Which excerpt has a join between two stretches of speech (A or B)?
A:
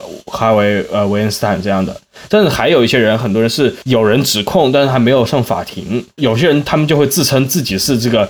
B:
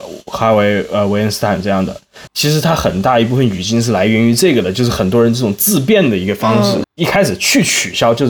B